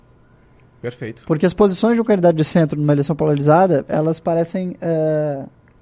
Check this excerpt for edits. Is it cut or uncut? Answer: uncut